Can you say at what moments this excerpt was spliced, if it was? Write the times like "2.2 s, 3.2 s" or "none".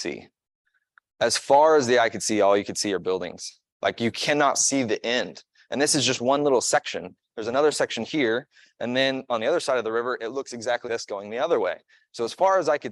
3.7 s, 10.8 s